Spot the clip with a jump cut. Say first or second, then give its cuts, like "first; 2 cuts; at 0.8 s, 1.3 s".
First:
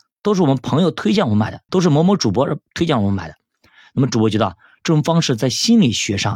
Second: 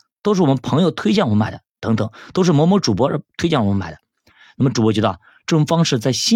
first; 1 cut; at 1.7 s